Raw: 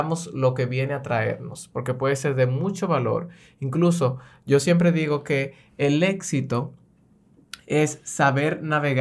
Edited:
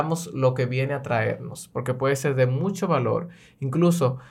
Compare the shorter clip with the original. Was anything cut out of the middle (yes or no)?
no